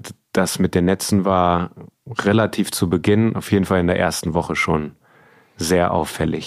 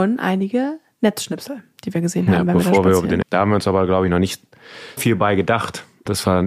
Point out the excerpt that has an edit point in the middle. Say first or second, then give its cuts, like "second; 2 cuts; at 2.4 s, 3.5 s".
second; 2 cuts; at 3.2 s, 5.0 s